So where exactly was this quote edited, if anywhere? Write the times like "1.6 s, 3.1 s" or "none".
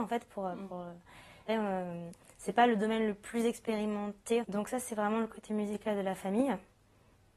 1.5 s, 4.4 s